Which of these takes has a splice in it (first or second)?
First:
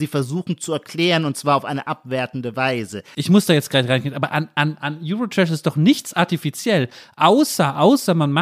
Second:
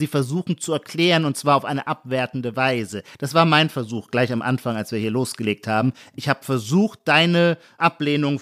first